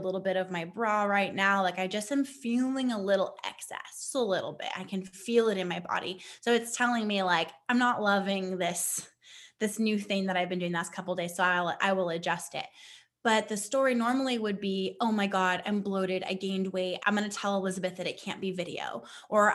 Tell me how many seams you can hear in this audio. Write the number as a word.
one